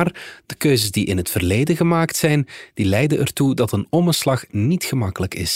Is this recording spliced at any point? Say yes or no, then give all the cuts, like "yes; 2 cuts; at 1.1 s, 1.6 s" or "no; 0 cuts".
no; 0 cuts